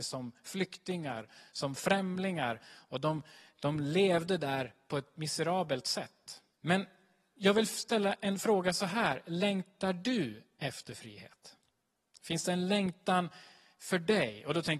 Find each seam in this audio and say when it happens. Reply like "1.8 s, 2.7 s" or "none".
6.5 s